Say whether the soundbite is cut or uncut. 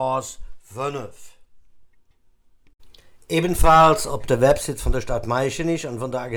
uncut